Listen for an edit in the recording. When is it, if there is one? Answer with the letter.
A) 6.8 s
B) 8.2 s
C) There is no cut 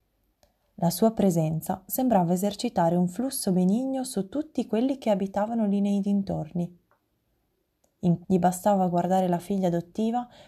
B